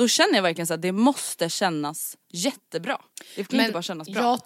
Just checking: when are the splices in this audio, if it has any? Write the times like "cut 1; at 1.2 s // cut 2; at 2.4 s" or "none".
cut 1; at 2.2 s